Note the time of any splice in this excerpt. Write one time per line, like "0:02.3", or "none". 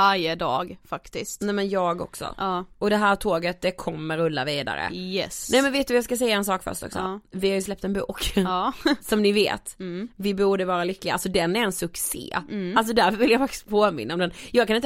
none